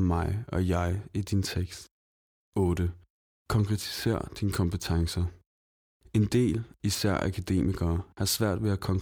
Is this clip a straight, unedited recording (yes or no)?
yes